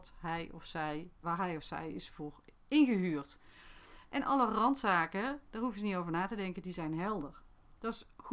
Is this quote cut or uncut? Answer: cut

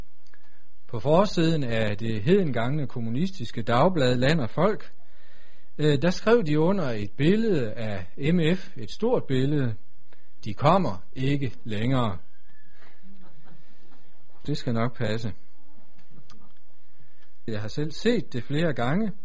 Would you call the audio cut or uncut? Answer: cut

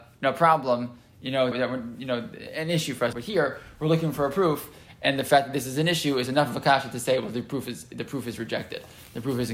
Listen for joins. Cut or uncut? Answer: cut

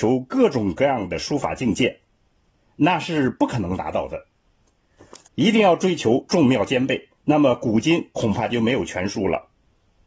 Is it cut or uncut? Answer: cut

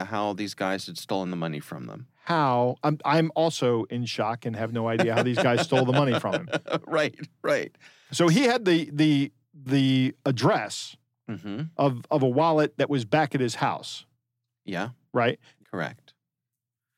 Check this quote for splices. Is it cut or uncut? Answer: cut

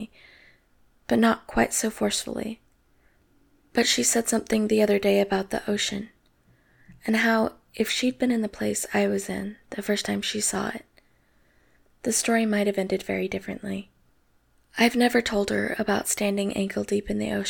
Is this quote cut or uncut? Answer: uncut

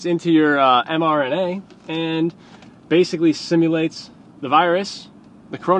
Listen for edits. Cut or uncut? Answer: uncut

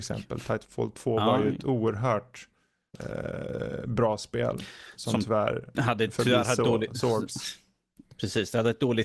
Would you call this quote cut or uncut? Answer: uncut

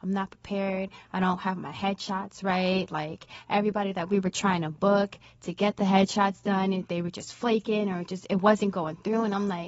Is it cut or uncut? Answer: uncut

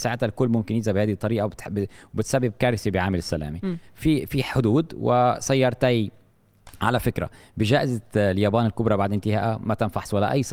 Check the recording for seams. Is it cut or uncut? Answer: uncut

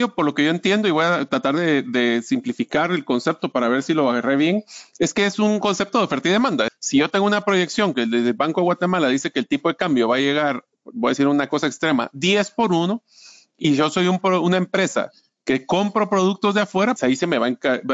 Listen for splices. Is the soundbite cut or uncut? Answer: cut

